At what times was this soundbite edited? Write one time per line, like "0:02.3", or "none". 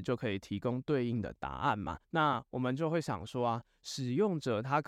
0:02.0